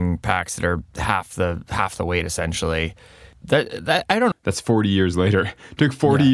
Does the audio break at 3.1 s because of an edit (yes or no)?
no